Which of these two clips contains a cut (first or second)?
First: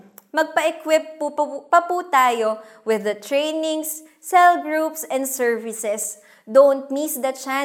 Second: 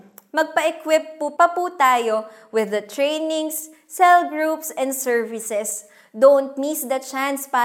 second